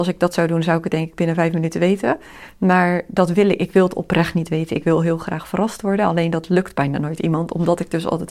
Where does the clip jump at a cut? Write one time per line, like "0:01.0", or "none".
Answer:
none